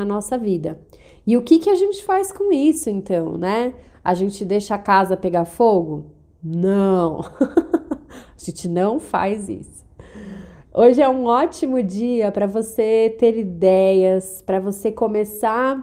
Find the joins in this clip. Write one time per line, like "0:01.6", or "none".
none